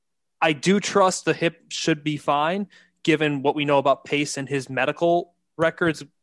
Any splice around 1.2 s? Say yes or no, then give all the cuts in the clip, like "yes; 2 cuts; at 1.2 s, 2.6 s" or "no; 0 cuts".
yes; 1 cut; at 1.2 s